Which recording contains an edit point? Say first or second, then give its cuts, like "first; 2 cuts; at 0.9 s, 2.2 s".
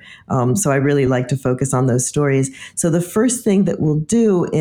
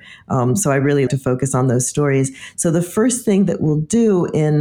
second; 1 cut; at 1.1 s